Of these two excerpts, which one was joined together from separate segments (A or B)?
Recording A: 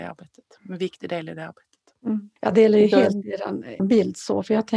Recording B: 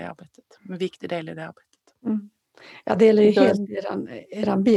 A